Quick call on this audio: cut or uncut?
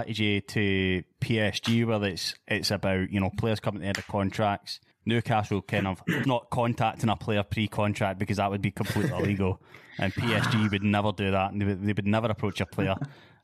cut